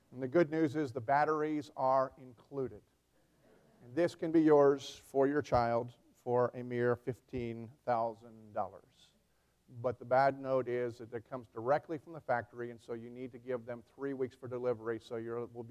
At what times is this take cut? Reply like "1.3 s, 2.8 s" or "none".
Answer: none